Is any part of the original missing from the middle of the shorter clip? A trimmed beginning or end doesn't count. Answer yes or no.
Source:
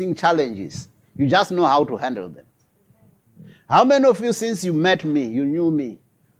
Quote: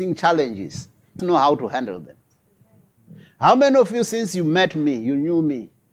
yes